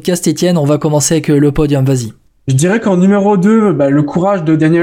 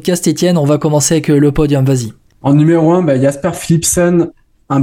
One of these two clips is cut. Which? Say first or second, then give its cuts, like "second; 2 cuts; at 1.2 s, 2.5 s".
first; 1 cut; at 2.3 s